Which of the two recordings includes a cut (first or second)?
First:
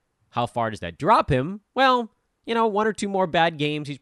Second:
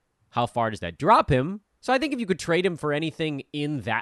second